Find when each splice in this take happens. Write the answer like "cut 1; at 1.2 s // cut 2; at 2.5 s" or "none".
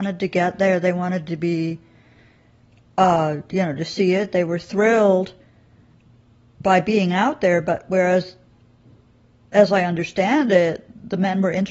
none

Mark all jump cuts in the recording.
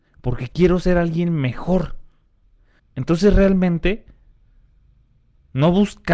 cut 1; at 2.8 s

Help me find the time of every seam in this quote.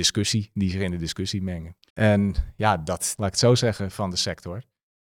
cut 1; at 1.9 s // cut 2; at 3.2 s

